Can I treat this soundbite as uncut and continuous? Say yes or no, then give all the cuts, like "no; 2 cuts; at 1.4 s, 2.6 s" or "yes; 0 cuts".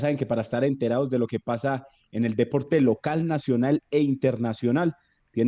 yes; 0 cuts